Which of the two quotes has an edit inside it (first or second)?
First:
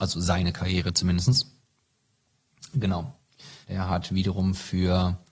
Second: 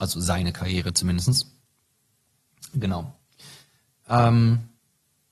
first